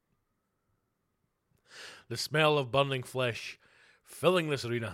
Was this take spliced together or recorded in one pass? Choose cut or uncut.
uncut